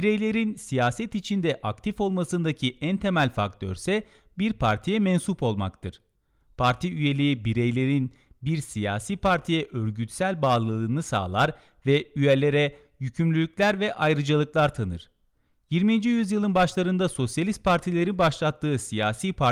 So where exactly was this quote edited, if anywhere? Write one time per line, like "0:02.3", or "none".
none